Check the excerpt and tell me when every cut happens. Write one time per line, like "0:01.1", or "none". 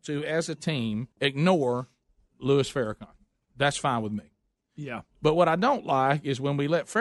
0:01.1